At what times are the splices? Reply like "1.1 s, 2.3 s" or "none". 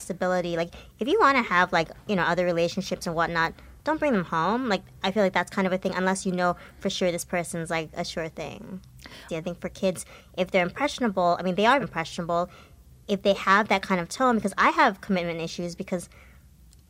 9.3 s, 11.8 s